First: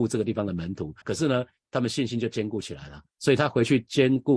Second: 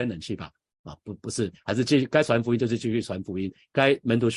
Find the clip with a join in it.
first; 2 cuts; at 1.0 s, 3.1 s

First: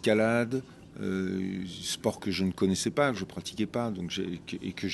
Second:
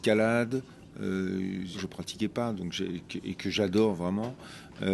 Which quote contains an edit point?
second; 1 cut; at 1.7 s

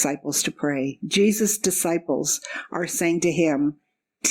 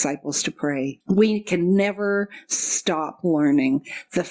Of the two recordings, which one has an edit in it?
second; 1 cut; at 1.0 s

